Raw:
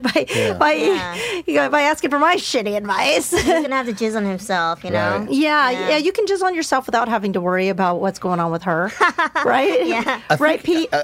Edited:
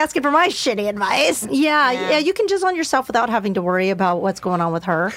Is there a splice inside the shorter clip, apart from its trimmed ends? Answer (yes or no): yes